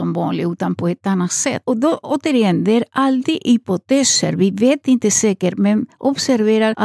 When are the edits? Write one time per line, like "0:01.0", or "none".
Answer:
none